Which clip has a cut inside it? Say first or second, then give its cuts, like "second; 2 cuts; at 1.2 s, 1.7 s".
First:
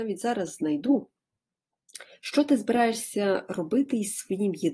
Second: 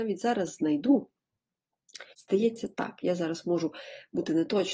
second; 1 cut; at 2.1 s